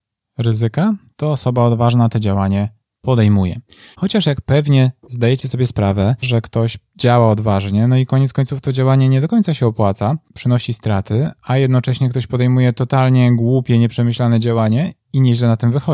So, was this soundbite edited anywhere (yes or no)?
yes